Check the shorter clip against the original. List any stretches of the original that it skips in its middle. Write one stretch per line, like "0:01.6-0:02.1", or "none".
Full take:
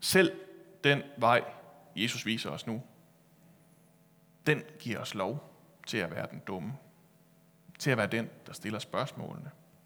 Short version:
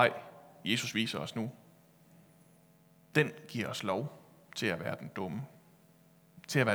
none